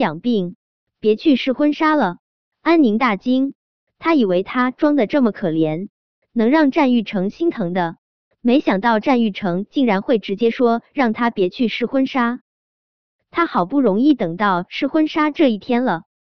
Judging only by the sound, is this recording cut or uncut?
cut